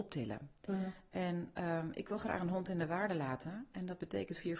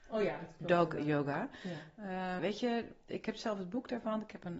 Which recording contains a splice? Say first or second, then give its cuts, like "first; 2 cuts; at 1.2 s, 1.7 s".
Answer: second; 1 cut; at 2.4 s